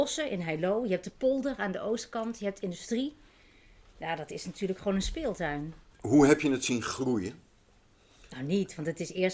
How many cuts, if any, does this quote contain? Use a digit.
1